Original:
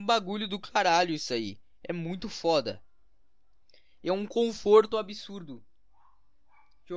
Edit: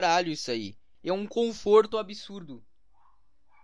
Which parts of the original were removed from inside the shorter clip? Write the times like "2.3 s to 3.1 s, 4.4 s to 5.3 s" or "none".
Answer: 1.8 s to 3.9 s